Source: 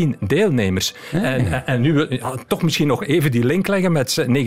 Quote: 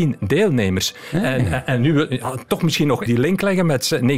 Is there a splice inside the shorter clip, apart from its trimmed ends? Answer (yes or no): yes